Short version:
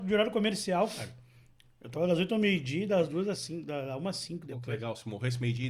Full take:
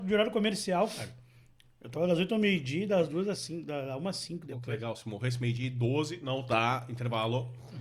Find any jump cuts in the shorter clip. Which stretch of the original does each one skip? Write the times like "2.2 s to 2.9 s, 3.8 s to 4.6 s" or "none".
none